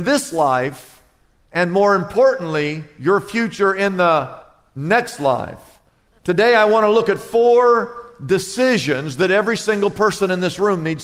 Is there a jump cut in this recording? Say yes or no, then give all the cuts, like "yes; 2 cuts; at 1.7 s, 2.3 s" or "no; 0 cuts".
yes; 1 cut; at 6.1 s